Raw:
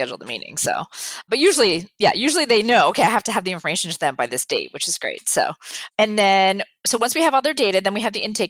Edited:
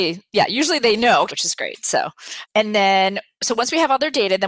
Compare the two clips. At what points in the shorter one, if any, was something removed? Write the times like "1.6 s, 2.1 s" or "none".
1.3 s